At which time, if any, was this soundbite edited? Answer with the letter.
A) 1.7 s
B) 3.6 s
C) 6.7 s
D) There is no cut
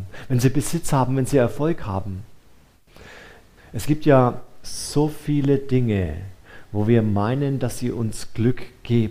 B